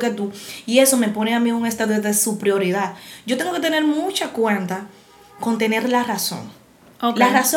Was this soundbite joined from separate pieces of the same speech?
no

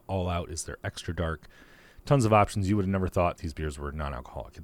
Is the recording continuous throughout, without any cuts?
no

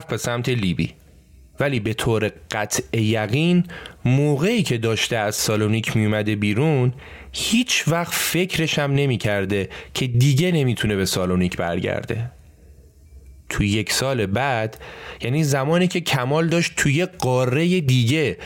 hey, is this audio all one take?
yes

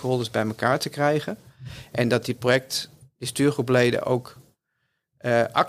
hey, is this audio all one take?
no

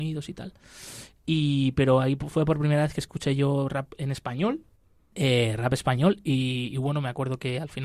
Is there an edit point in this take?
no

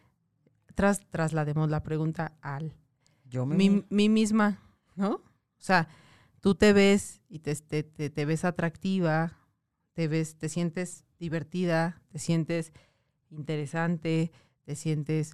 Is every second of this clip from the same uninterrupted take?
yes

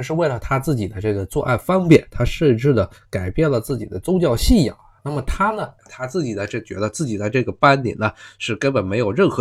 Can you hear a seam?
yes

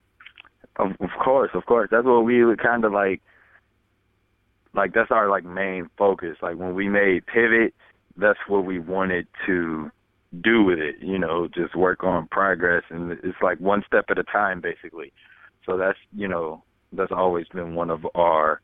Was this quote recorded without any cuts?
yes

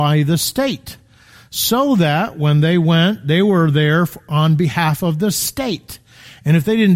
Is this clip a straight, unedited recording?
yes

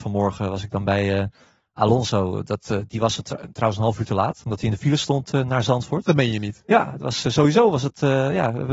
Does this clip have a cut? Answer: no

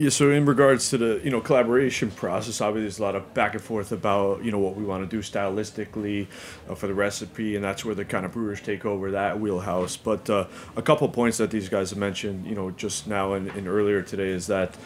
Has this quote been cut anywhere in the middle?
no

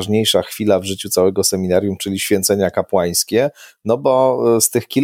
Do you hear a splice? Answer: no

